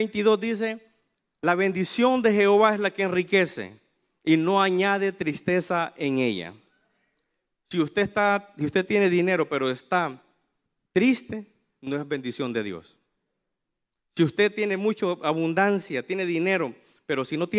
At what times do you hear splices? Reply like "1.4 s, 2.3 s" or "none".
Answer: none